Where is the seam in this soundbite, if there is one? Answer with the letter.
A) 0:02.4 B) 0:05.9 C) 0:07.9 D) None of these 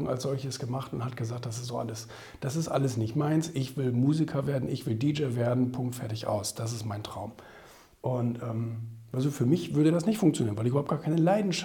D